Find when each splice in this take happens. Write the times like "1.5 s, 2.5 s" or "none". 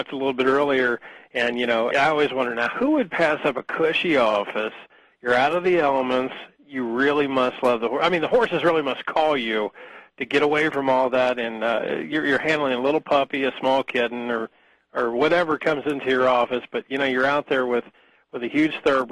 1.9 s